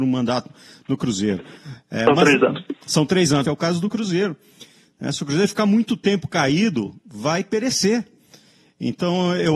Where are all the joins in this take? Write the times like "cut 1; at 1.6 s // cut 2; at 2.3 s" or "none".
cut 1; at 3.4 s